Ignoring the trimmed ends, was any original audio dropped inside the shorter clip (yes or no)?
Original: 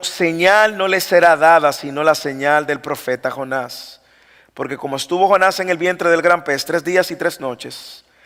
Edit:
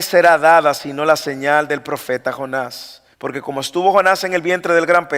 yes